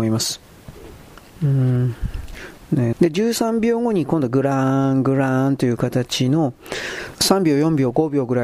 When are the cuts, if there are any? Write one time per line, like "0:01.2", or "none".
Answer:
0:02.9
0:07.1